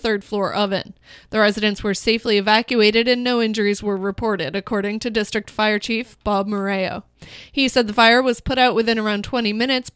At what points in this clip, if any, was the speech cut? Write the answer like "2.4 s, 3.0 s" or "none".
none